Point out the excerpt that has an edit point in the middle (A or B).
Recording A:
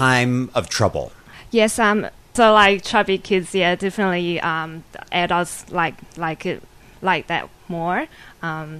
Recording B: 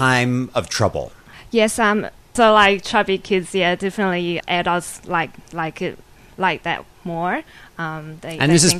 B